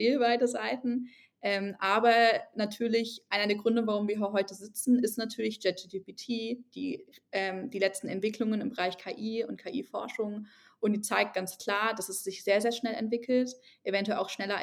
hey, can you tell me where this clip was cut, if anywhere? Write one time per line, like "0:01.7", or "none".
none